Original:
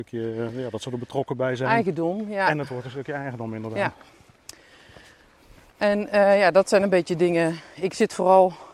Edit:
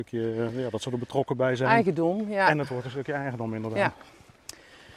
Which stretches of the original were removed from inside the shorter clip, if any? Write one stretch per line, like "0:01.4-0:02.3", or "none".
none